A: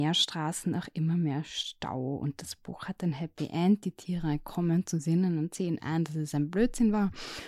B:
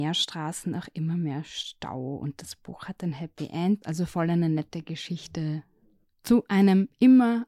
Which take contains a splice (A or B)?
B